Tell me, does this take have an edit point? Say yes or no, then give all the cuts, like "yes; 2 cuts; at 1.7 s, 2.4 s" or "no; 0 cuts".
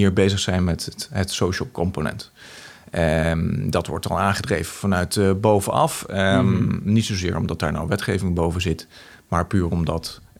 no; 0 cuts